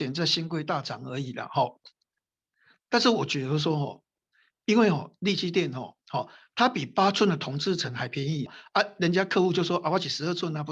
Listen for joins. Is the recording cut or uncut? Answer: cut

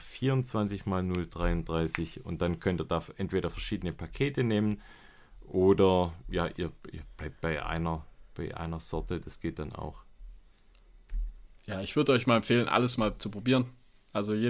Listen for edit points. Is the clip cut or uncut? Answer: uncut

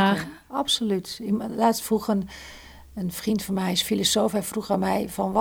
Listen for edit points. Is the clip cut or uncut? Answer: uncut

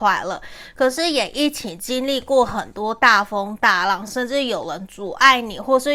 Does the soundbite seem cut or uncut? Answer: uncut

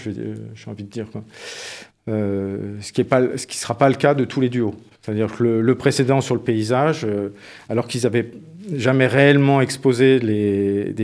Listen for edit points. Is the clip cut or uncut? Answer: uncut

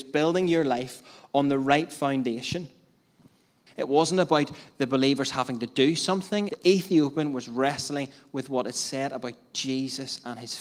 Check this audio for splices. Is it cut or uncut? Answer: cut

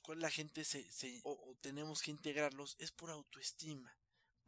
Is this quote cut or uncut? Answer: cut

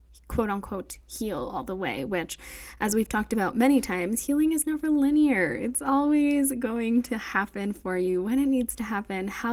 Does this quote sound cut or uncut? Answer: uncut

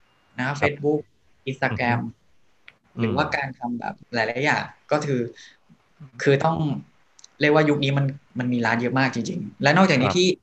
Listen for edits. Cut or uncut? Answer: cut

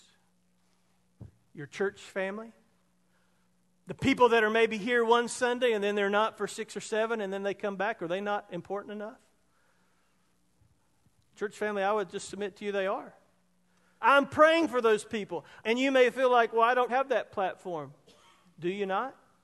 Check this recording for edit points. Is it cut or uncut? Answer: cut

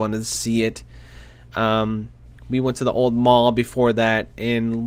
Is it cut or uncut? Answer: uncut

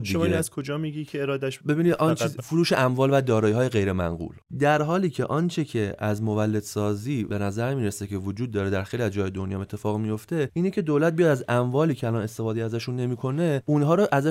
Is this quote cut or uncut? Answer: cut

